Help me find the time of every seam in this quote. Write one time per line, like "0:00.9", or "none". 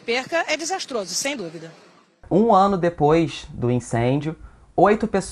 none